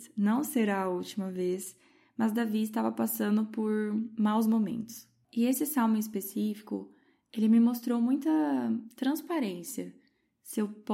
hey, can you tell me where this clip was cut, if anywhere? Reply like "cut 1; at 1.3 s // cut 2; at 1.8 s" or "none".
none